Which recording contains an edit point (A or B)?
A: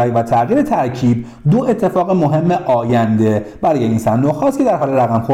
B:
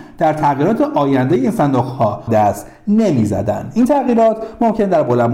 B